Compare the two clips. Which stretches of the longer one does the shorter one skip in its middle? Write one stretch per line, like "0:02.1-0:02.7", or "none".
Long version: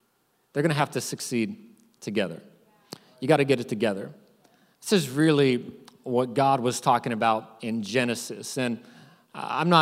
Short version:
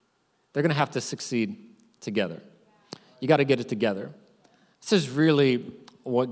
none

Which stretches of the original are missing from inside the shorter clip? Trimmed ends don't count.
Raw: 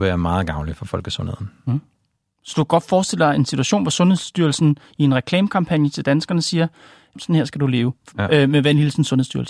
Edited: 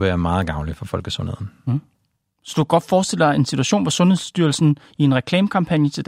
none

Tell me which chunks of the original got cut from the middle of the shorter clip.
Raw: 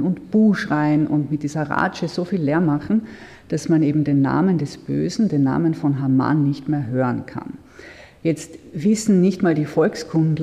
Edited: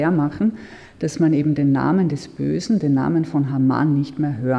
none

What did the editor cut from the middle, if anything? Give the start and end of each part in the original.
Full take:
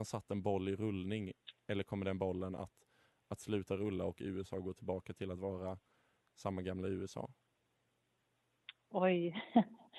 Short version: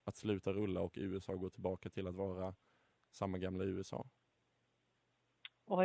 none

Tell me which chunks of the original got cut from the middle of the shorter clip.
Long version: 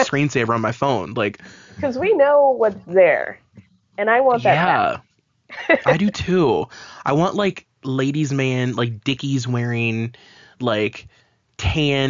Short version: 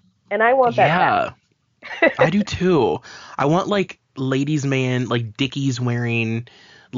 none

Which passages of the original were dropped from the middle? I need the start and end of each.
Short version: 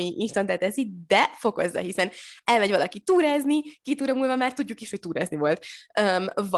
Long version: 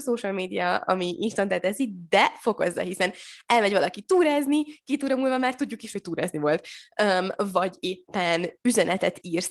none

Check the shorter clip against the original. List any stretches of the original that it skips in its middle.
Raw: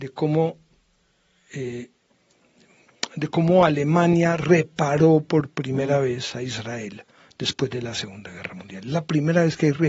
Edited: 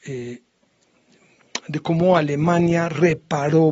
none

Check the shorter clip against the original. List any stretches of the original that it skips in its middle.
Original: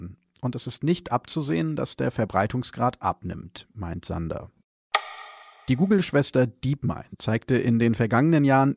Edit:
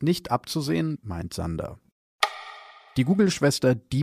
0:01.8-0:03.7

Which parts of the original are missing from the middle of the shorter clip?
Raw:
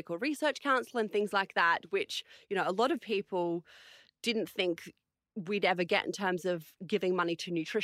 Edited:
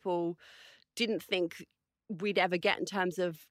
none

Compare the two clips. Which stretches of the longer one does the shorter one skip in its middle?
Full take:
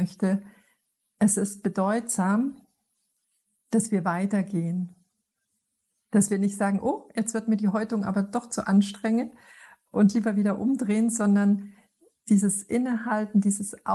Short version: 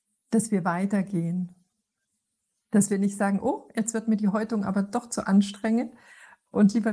none

